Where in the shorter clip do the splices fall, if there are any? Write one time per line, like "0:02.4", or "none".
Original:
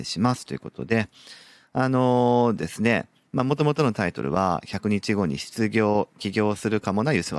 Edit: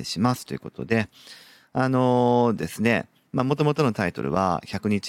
none